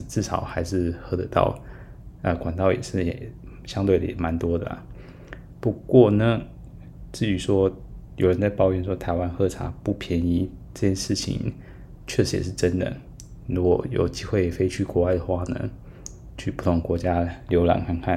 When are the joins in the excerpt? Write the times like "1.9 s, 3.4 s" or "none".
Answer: none